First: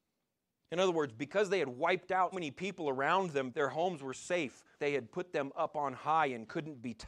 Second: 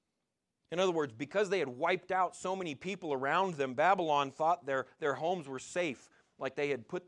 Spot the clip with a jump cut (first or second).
first